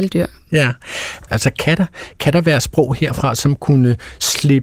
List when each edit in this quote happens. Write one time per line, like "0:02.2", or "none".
0:01.3